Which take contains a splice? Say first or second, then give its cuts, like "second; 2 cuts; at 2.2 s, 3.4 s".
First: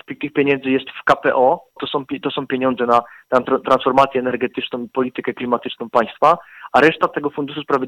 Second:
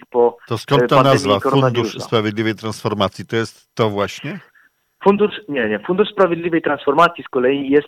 first; 1 cut; at 1.8 s